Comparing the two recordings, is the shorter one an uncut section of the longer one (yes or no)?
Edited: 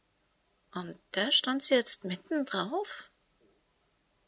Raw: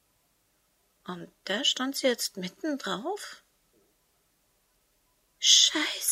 yes